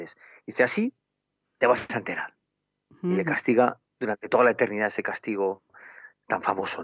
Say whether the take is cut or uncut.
uncut